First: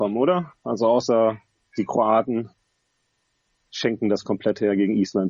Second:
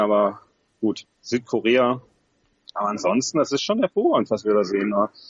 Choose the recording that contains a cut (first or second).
second